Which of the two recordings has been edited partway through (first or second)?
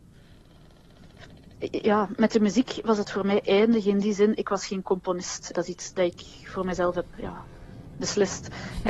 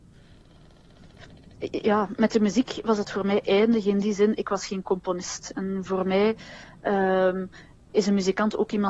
first